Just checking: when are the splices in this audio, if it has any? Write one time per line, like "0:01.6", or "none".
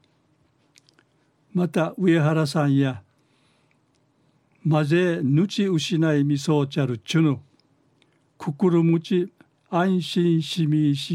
none